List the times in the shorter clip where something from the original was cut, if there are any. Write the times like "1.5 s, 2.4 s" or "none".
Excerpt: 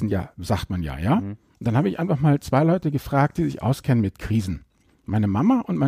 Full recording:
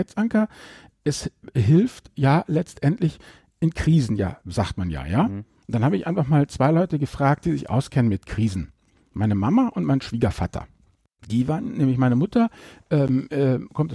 none